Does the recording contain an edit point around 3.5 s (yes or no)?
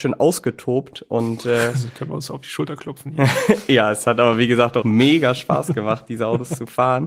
no